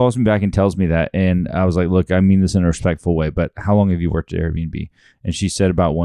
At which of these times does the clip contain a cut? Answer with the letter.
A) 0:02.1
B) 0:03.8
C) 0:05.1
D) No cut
D